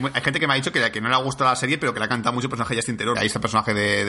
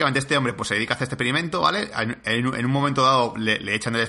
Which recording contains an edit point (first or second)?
first